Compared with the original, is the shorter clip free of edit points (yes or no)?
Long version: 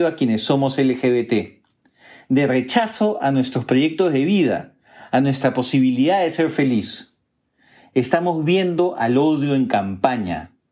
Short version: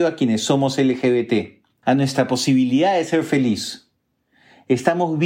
no